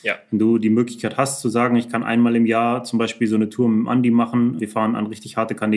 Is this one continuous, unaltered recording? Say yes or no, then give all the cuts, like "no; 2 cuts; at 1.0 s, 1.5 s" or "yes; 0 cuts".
no; 1 cut; at 4.6 s